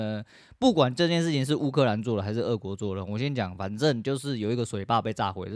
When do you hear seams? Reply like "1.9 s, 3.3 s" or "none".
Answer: none